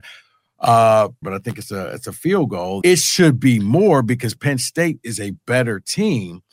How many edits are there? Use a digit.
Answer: 2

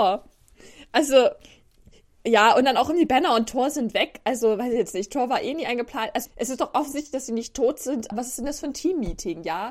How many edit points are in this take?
2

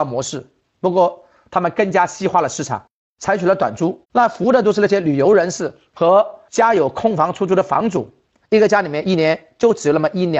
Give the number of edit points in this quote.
2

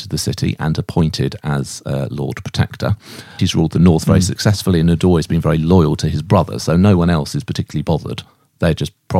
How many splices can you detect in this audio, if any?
1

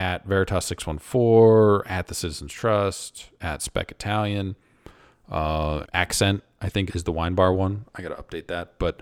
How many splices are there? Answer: 2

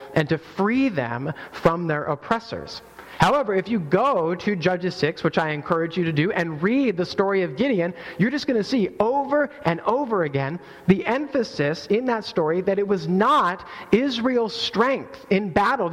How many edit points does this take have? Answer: 0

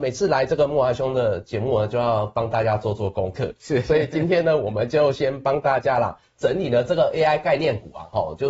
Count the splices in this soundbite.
0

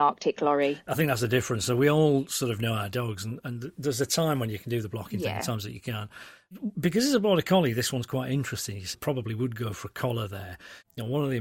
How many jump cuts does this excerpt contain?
1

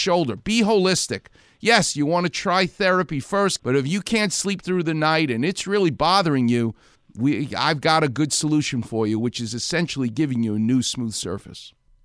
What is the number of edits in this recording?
1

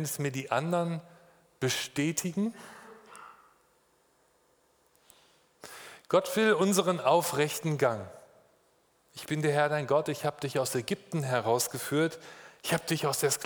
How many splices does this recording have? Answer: 0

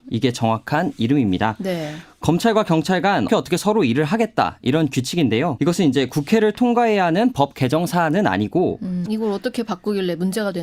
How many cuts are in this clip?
3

